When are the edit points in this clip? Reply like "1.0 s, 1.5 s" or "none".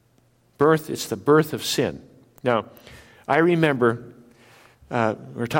none

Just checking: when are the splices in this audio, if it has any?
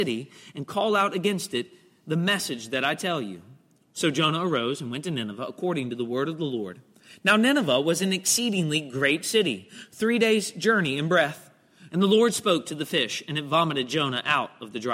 11.9 s

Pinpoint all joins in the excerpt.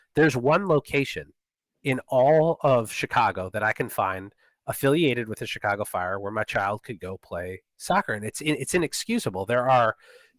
none

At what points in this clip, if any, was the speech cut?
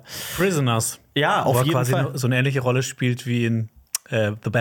none

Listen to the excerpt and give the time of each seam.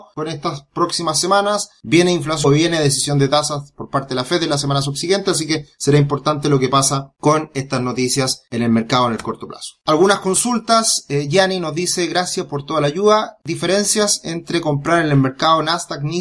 none

